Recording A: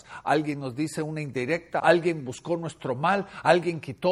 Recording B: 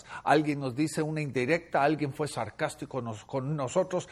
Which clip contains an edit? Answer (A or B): A